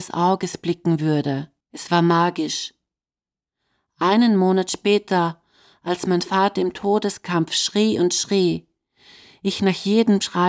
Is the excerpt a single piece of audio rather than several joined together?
no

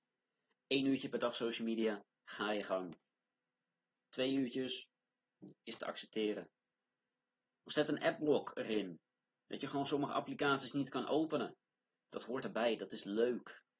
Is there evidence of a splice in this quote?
yes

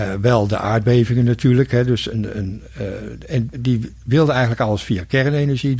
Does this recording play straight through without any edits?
no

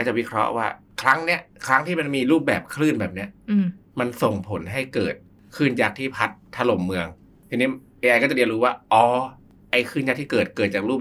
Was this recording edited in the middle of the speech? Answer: no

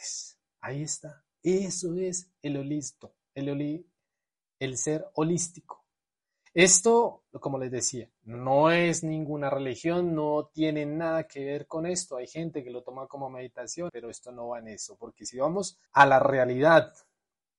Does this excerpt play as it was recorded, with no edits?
no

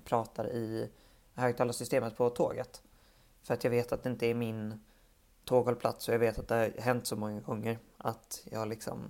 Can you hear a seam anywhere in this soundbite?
no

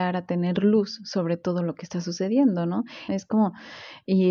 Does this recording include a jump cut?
yes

